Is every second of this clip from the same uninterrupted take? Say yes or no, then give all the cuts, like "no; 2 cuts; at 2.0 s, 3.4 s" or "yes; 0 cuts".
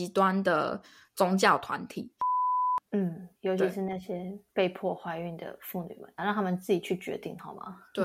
no; 2 cuts; at 2.8 s, 6.2 s